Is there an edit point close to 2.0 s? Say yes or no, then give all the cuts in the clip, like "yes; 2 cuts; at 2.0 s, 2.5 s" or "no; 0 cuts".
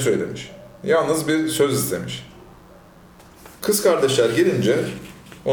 no; 1 cut; at 3.6 s